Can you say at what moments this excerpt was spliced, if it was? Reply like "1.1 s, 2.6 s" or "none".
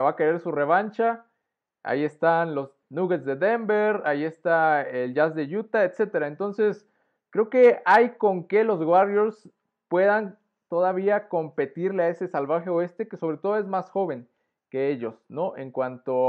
none